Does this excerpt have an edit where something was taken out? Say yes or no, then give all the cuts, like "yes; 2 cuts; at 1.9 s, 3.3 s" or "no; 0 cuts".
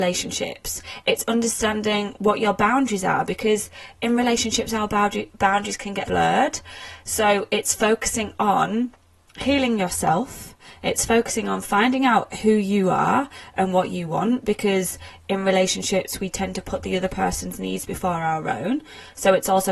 yes; 1 cut; at 6.0 s